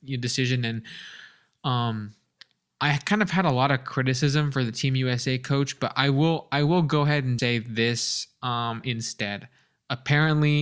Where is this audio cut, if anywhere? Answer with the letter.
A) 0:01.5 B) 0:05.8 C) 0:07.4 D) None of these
C